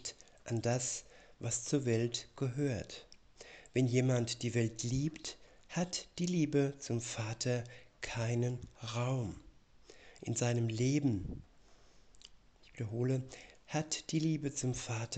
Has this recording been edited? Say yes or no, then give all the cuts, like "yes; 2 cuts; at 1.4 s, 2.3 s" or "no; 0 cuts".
yes; 1 cut; at 13.5 s